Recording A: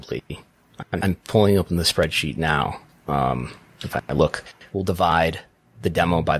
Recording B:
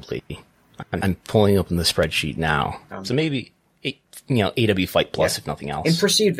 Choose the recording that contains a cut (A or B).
B